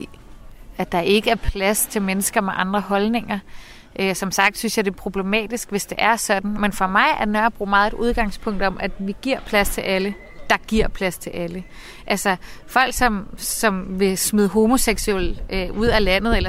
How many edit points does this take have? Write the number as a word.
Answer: zero